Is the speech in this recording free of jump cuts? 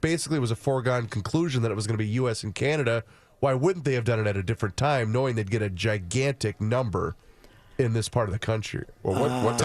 yes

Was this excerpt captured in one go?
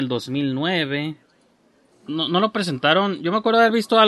no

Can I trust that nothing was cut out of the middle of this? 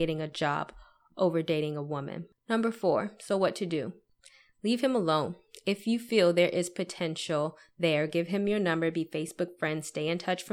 yes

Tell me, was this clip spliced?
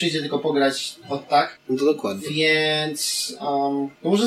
no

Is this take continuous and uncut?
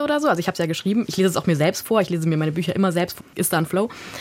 no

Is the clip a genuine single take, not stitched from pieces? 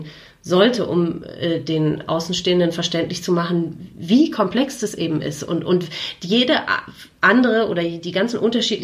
yes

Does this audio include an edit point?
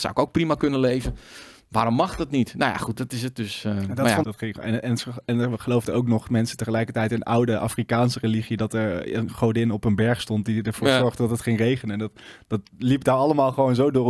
yes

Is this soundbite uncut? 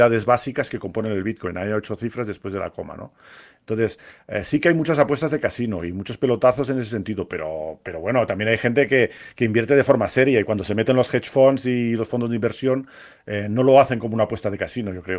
yes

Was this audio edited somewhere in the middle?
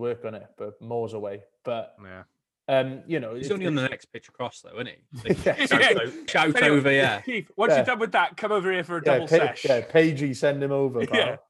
yes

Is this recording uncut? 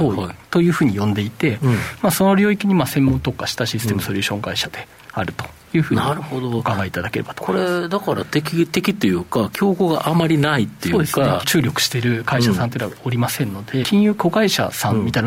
no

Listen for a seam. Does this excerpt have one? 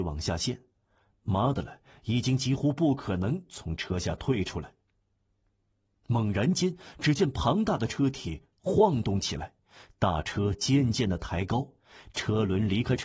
no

